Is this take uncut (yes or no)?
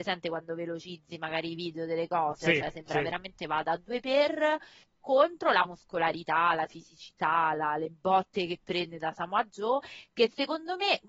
yes